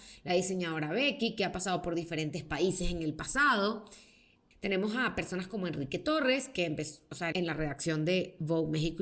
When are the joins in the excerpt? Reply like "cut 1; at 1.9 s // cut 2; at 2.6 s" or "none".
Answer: cut 1; at 4.5 s // cut 2; at 7.3 s